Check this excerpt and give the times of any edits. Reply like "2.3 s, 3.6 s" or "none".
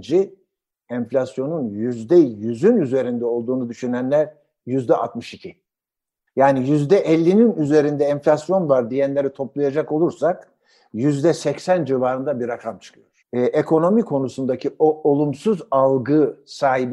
13.2 s